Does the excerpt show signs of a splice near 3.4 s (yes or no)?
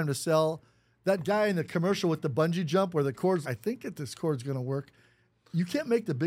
yes